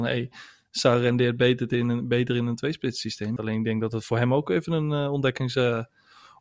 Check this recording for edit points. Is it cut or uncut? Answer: cut